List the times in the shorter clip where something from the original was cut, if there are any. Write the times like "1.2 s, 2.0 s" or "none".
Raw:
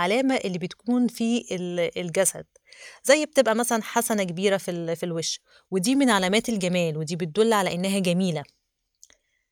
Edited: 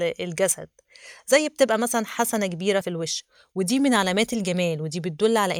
2.8 s